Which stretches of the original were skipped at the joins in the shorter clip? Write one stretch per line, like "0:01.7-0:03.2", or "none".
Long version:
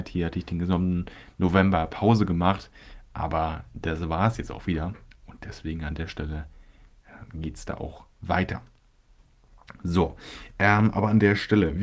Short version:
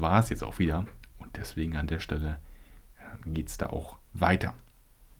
none